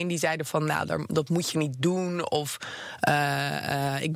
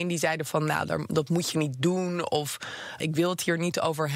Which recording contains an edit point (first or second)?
second